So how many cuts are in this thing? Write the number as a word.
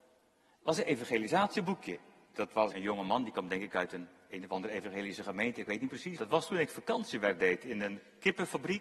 two